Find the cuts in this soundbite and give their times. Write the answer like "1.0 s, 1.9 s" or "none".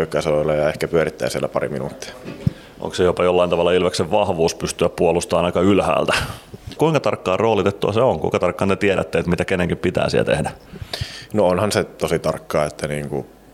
6.8 s